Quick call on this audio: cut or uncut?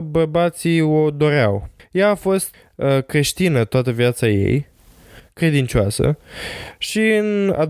uncut